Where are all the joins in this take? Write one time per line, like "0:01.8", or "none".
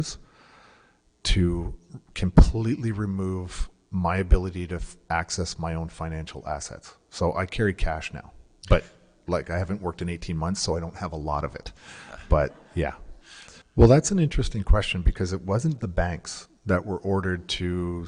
0:13.6
0:15.8